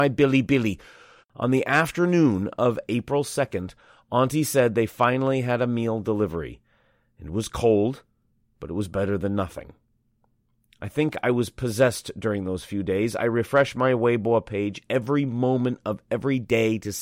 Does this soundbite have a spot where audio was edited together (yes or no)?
yes